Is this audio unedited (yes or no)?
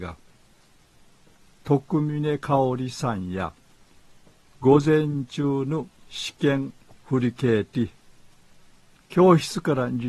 yes